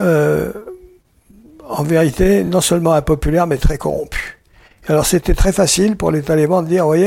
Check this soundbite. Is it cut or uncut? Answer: uncut